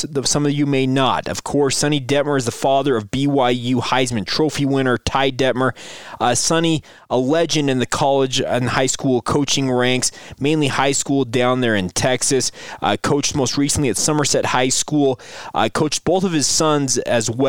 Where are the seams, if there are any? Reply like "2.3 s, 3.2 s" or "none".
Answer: none